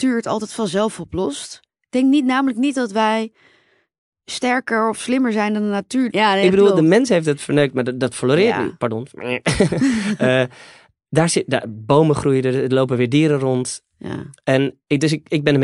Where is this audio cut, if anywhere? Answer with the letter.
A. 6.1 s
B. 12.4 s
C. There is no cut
A